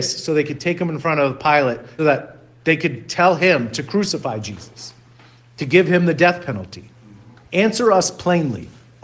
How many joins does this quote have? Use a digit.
2